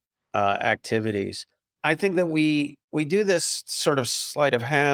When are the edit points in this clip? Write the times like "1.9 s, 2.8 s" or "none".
1.8 s, 2.8 s